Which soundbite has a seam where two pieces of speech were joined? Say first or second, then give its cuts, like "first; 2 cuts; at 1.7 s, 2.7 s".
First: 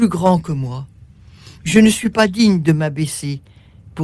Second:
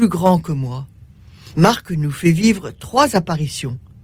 second; 1 cut; at 1.5 s